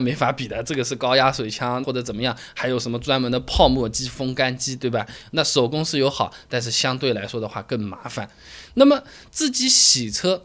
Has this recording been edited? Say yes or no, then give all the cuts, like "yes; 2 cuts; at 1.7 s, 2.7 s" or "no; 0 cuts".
yes; 1 cut; at 1.8 s